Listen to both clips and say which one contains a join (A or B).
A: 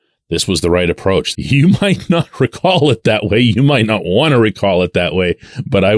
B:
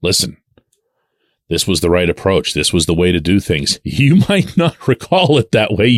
A